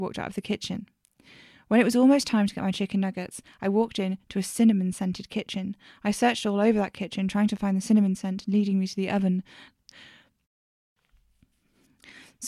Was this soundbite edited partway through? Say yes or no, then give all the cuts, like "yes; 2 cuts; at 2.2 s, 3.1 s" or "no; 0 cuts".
yes; 1 cut; at 9.7 s